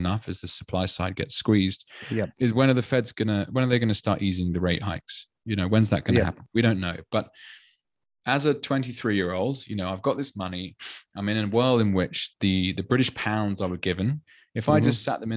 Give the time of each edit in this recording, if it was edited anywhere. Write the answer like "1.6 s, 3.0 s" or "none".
none